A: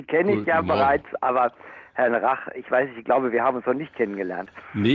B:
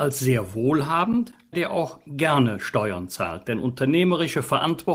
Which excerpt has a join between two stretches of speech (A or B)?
B